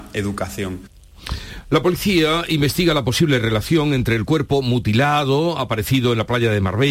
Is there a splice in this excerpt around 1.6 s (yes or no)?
no